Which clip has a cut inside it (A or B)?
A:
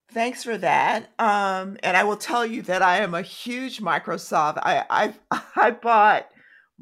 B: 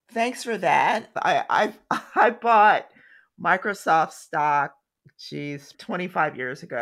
B